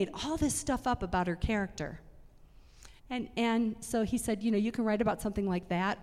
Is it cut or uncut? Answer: cut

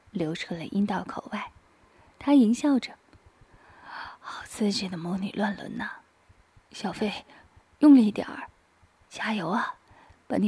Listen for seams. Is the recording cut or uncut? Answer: uncut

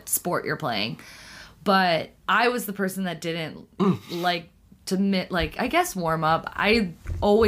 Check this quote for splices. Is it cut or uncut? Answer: cut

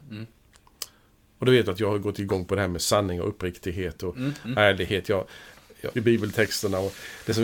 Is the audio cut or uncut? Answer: cut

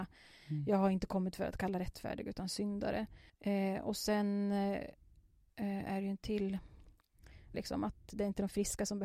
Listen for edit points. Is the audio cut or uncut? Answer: cut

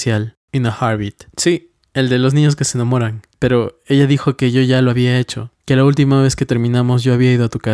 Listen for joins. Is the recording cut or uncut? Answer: cut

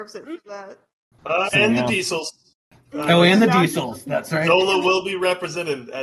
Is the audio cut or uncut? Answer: cut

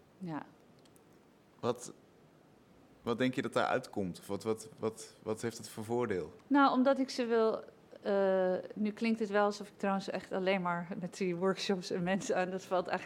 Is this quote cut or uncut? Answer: cut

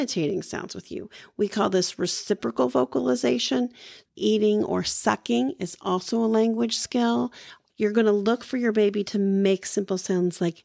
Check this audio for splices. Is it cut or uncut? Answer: cut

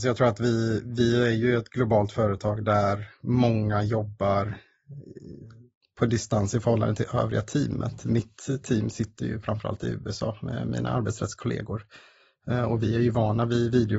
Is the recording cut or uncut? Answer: uncut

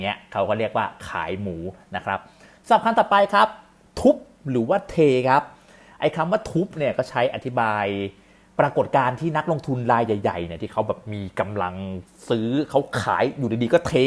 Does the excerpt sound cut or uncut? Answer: uncut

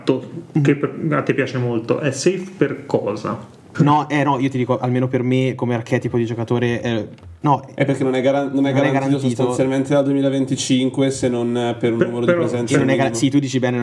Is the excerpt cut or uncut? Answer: cut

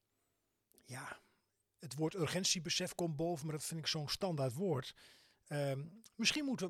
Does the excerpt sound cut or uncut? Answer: uncut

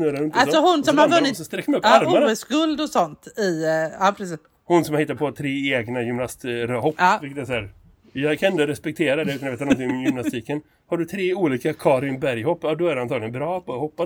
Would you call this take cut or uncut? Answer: uncut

